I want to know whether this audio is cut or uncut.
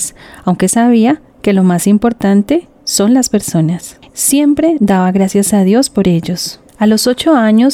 cut